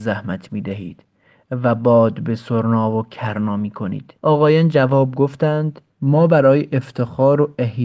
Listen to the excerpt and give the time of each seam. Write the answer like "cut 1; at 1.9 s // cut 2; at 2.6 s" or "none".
cut 1; at 4.2 s